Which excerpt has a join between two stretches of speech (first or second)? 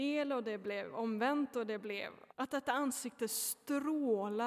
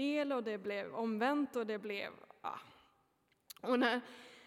first